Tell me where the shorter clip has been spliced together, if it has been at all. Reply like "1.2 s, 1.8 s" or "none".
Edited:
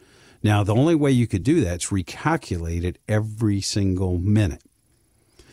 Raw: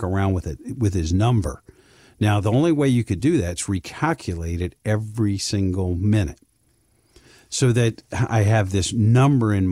none

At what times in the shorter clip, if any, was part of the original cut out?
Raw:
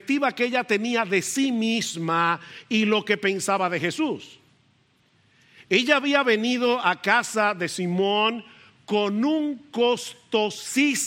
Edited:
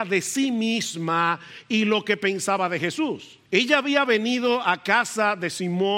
3.4 s

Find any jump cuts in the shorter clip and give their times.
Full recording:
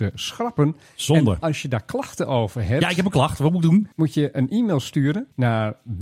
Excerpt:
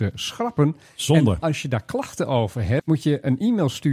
2.8 s

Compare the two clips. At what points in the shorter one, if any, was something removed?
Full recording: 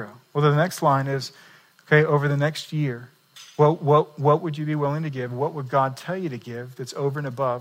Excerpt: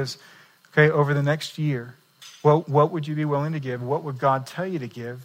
2.6 s

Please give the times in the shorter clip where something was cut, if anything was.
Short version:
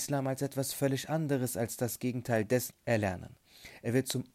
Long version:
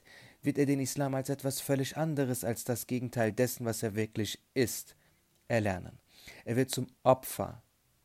2.7 s

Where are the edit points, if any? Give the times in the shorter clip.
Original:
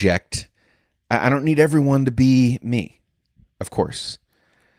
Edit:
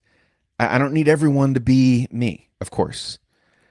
2.5 s

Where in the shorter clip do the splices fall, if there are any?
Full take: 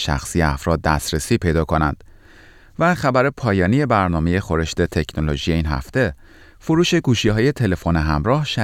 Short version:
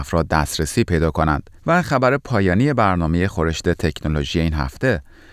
1.6 s

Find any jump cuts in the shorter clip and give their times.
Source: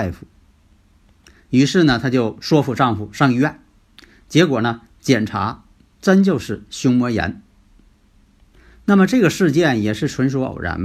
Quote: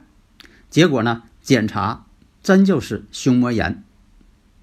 none

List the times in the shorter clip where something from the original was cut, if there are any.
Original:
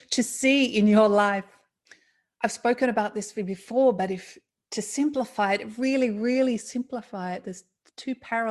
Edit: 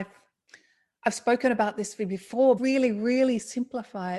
2.6 s

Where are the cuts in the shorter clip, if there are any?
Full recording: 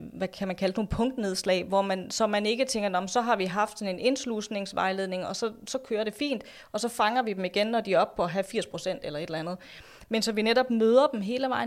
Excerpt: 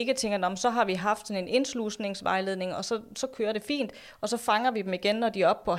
none

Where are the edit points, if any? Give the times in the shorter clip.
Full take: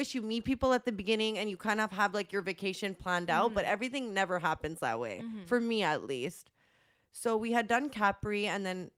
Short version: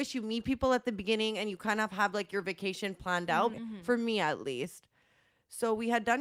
3.5 s

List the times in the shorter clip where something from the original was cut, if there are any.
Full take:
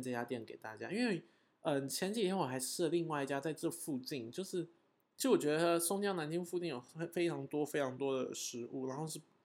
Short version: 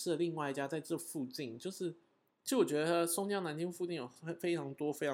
none

